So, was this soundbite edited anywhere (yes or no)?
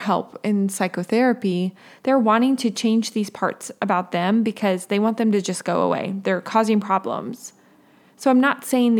no